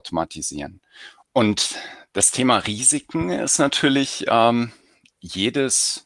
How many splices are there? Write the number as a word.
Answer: one